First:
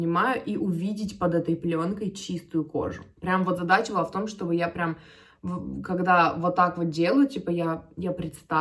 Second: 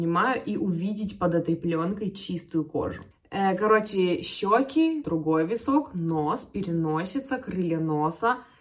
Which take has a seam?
second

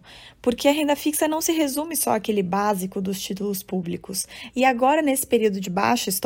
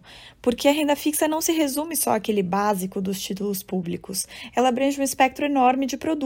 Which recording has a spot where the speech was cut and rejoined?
first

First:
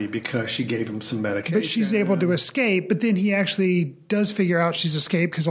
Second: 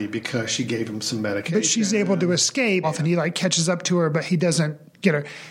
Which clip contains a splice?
second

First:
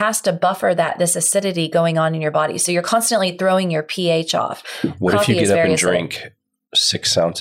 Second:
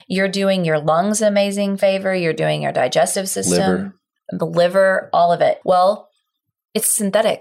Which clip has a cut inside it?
second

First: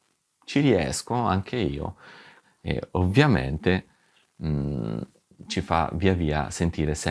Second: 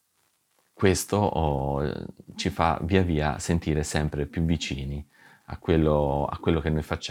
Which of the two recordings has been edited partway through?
first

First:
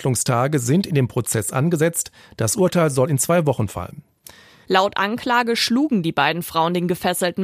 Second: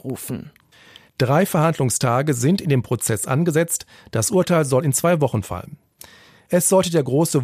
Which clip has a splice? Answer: first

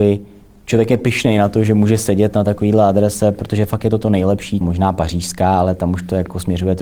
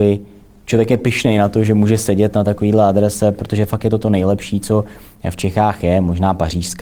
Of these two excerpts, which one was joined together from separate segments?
first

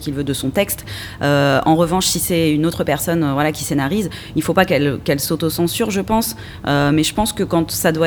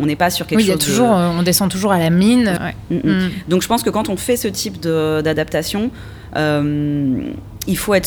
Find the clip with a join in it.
second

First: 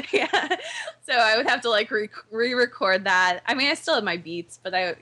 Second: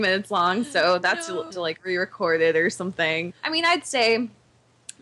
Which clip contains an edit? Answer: second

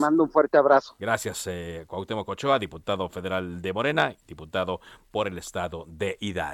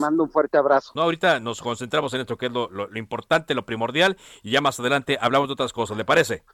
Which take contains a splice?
second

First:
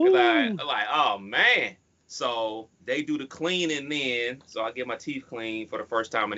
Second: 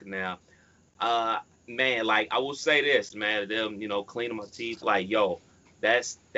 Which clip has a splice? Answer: second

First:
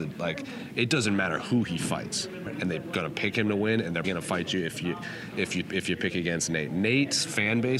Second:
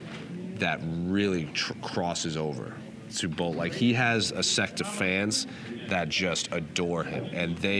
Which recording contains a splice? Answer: first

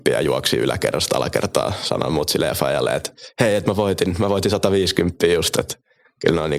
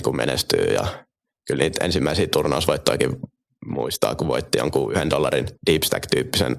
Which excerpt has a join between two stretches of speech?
second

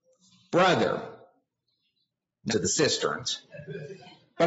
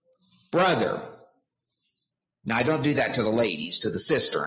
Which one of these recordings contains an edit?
first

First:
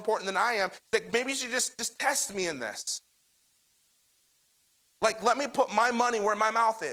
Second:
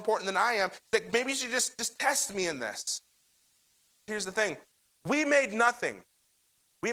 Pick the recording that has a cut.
second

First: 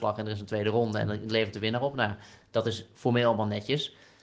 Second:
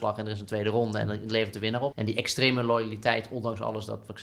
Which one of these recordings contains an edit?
second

